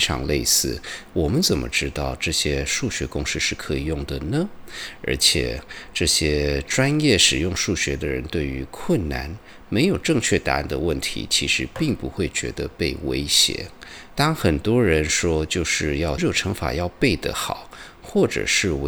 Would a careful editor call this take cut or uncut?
cut